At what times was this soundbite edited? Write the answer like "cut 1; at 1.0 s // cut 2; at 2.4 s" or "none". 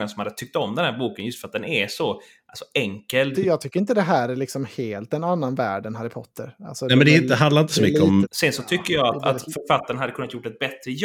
cut 1; at 3.3 s // cut 2; at 8.2 s